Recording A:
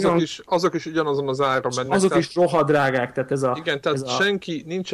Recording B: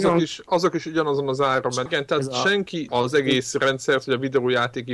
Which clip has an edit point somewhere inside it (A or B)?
B